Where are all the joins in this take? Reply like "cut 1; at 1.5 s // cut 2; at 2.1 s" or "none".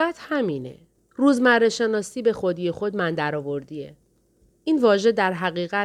cut 1; at 1.0 s